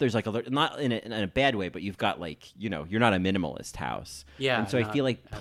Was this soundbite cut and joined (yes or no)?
no